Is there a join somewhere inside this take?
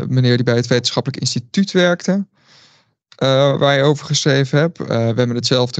no; 0 cuts

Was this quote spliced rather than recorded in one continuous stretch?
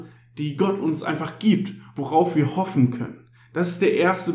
no; 0 cuts

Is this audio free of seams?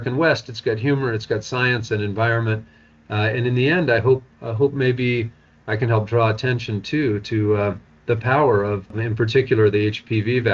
yes; 0 cuts

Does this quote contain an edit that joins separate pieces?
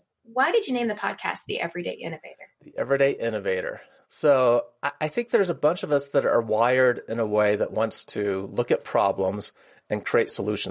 no; 0 cuts

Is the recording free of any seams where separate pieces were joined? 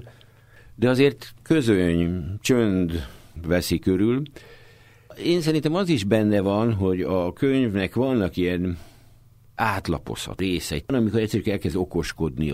yes; 0 cuts

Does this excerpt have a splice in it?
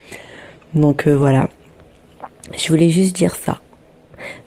no; 0 cuts

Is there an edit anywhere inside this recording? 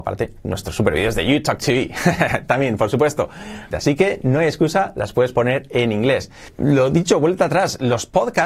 yes; 1 cut; at 3.7 s

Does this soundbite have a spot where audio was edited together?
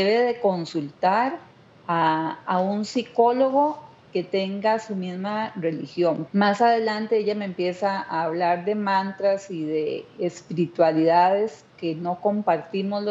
yes; 1 cut; at 6.3 s

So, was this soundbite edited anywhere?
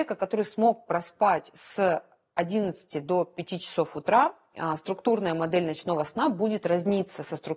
no; 0 cuts

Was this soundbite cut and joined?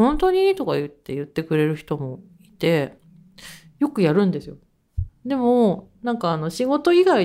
yes; 1 cut; at 5.1 s

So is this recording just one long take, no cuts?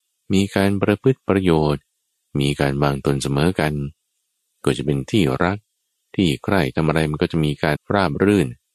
no; 1 cut; at 7.8 s

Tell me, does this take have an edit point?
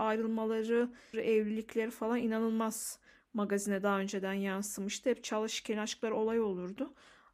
yes; 1 cut; at 1.1 s

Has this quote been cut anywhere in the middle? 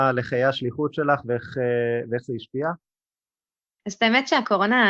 yes; 1 cut; at 3.8 s

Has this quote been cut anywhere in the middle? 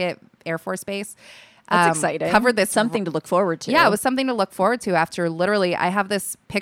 no; 0 cuts

